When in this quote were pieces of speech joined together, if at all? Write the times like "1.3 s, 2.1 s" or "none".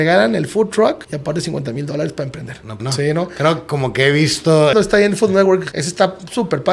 2.8 s, 4.7 s

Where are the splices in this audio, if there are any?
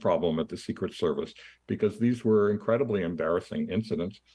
none

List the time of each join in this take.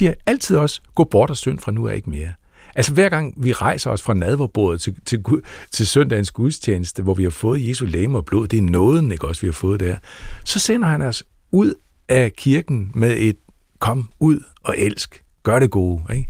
none

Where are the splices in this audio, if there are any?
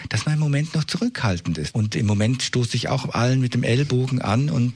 1.7 s

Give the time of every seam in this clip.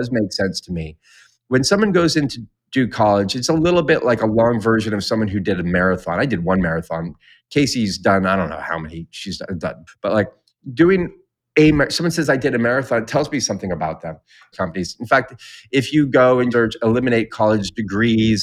9.9 s, 14.5 s, 16.5 s

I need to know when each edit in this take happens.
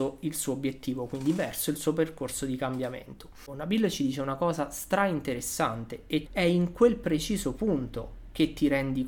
3.5 s, 6.3 s

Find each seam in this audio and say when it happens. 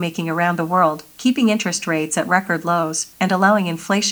3.1 s

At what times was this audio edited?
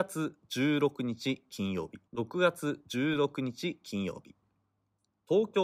2.1 s

